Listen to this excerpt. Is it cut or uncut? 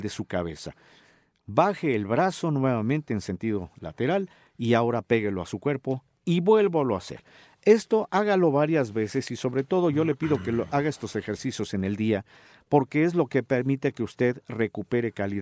uncut